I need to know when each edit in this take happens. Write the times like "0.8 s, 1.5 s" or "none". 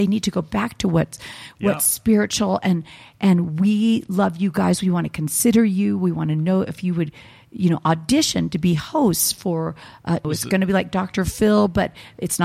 10.2 s